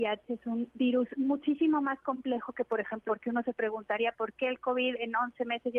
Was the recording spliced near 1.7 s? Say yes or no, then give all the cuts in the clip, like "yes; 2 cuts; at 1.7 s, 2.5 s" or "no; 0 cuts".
no; 1 cut; at 3.1 s